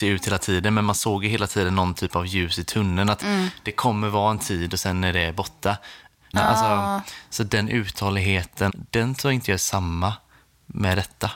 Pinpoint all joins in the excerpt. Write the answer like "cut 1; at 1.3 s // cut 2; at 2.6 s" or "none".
cut 1; at 6.3 s // cut 2; at 8.7 s